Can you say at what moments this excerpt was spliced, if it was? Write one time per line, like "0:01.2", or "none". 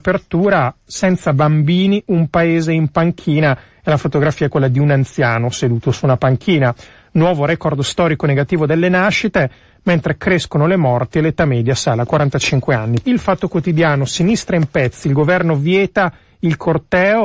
0:13.0